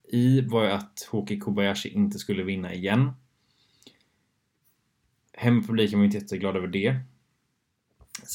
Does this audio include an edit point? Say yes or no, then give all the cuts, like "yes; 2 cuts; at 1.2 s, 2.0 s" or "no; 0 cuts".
no; 0 cuts